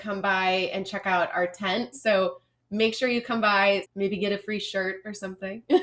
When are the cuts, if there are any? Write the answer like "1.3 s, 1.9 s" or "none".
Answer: 1.9 s, 3.8 s